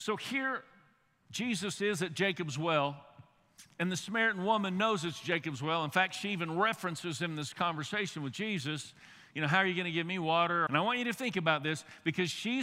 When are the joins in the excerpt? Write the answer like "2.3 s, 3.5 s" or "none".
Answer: 10.7 s